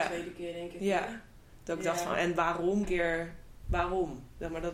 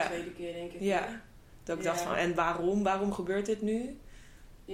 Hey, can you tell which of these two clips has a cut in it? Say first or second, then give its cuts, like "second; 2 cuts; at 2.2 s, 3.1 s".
first; 1 cut; at 2.8 s